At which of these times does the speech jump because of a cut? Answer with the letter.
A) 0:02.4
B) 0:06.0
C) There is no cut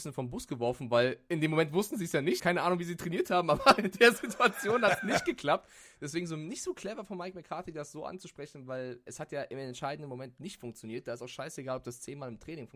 A